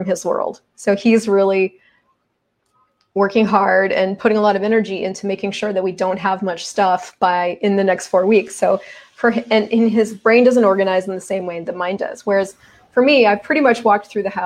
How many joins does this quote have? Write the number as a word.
zero